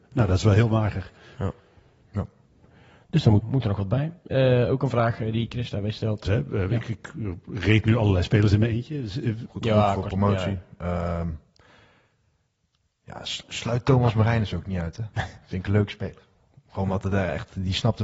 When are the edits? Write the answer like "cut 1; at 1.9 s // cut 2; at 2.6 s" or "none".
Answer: cut 1; at 3.4 s // cut 2; at 6.2 s // cut 3; at 9.5 s